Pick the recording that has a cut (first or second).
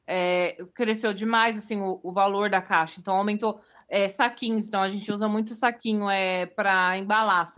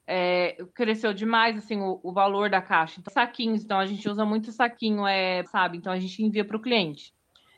second